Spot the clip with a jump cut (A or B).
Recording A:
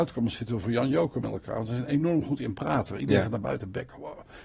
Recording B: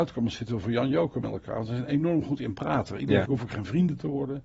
B